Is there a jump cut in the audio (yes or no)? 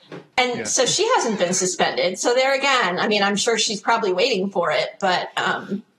no